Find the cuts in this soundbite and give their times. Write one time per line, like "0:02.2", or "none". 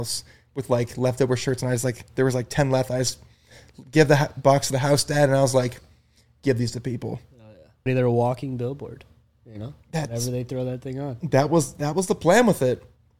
0:07.9